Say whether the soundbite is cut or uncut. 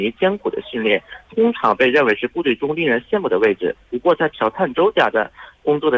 uncut